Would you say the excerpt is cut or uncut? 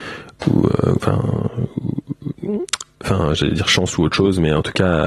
uncut